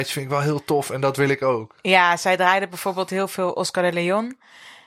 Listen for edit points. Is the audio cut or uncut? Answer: uncut